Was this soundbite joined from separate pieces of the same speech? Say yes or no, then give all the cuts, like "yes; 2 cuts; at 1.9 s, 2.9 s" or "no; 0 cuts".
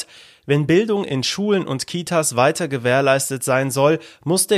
no; 0 cuts